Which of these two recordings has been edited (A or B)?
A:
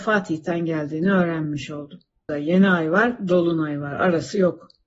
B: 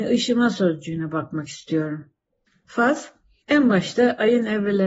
A